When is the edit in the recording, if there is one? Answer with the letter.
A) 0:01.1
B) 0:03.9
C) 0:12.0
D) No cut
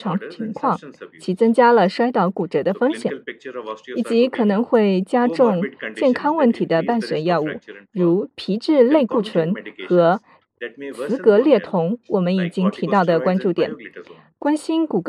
D